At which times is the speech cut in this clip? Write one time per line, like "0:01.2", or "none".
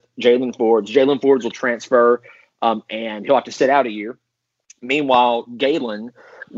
none

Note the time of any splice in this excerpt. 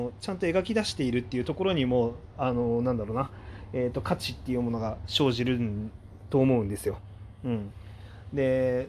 none

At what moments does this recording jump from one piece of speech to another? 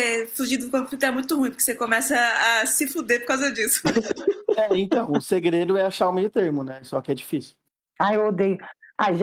none

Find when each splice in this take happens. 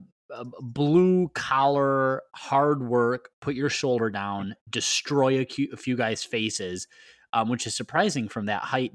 none

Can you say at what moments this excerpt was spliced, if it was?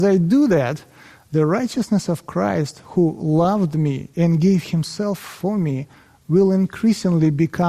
none

